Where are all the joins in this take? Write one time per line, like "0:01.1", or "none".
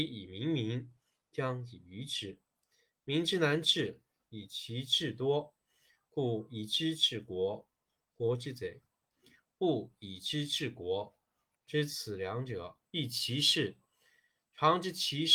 0:11.6
0:12.9